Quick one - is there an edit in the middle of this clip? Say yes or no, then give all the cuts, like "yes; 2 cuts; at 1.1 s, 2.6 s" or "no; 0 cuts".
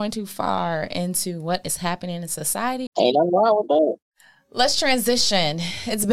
yes; 1 cut; at 2.9 s